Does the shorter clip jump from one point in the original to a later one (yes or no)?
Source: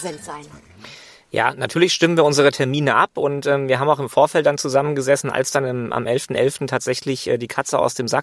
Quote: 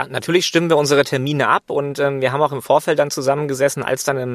no